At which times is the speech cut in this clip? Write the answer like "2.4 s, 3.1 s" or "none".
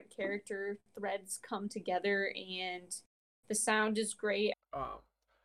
4.5 s